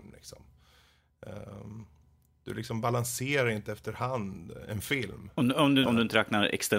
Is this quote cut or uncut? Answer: cut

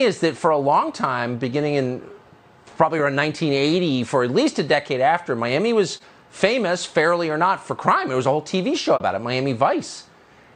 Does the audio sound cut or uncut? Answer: uncut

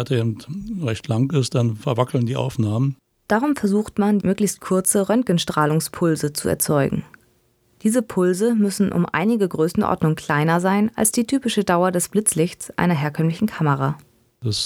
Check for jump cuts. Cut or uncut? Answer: cut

